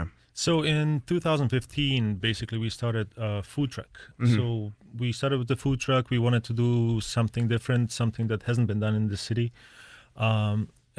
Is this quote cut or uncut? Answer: uncut